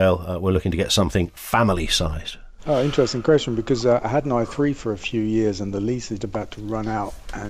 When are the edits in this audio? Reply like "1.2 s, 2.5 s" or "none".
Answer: 6.2 s